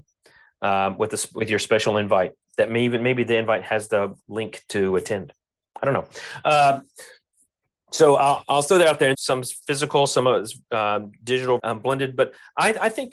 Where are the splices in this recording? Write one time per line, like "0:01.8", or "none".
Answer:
0:09.1
0:11.6